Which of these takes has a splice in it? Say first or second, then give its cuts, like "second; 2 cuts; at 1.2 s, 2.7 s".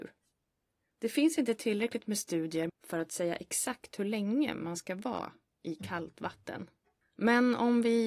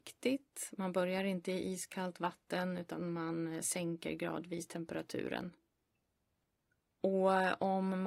first; 1 cut; at 2.7 s